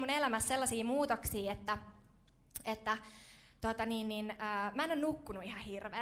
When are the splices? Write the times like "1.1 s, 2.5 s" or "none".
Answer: none